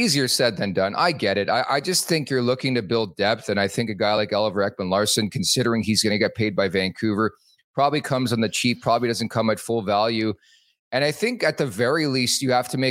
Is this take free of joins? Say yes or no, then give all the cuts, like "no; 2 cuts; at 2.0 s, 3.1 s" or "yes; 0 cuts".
yes; 0 cuts